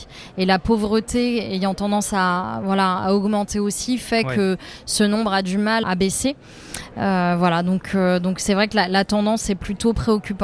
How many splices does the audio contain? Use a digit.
1